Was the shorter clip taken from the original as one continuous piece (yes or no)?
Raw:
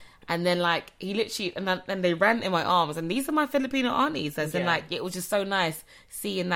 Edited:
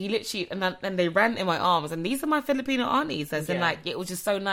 yes